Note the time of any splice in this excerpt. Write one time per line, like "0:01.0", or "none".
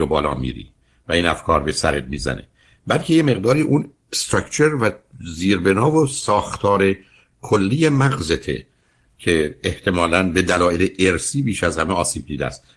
none